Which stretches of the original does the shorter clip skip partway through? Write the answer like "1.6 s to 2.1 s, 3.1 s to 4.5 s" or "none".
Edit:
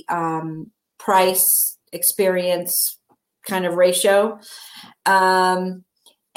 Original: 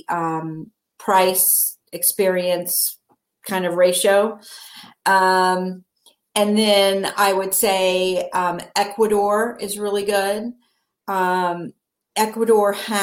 none